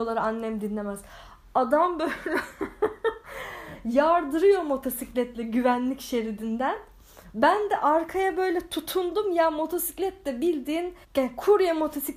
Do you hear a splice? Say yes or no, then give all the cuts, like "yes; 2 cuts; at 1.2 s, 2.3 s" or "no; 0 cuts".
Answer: yes; 1 cut; at 11.0 s